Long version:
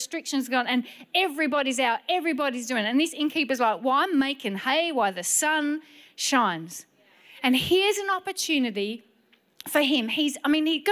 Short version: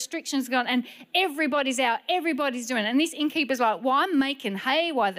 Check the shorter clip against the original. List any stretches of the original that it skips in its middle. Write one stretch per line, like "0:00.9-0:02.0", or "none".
none